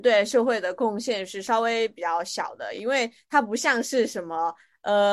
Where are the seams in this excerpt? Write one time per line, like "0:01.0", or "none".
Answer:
none